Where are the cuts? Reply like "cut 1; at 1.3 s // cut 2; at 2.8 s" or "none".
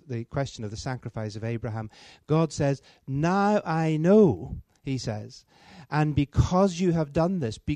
none